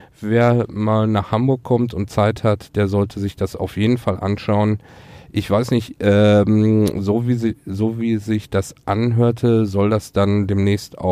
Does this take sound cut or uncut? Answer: uncut